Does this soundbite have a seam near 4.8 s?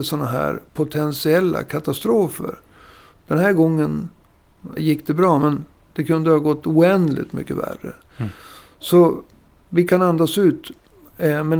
yes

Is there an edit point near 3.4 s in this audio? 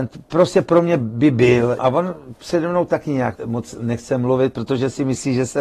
yes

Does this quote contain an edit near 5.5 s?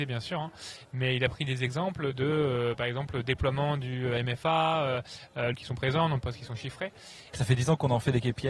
yes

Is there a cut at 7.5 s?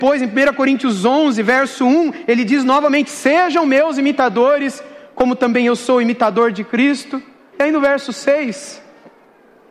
yes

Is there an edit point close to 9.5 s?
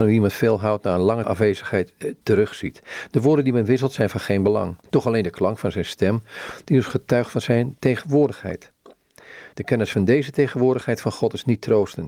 no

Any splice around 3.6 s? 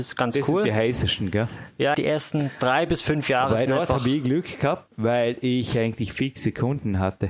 no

